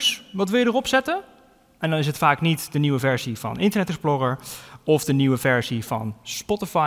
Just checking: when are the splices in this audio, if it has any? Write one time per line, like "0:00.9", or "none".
none

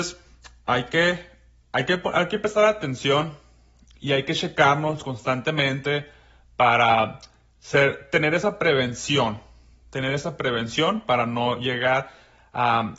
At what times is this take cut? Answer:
none

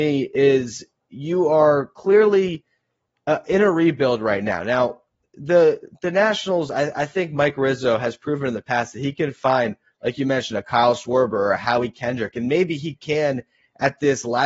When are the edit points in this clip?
none

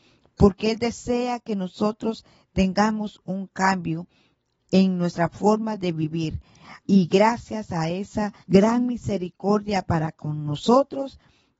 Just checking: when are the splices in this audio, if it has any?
0:06.8
0:08.4

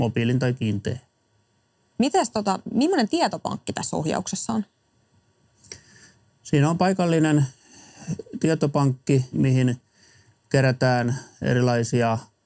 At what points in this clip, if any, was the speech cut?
0:01.8
0:09.3

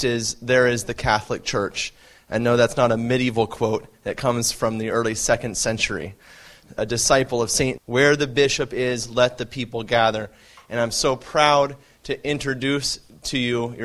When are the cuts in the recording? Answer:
0:07.8

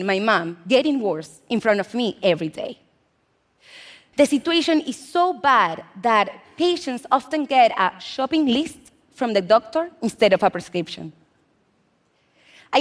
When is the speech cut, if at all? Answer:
0:04.1

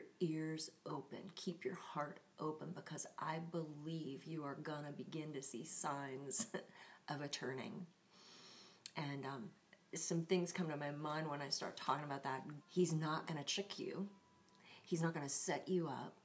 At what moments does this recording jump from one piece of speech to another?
0:12.6

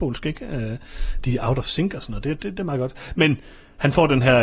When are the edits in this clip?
none

